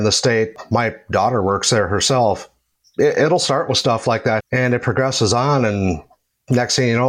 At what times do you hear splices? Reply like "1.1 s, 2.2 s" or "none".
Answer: 4.4 s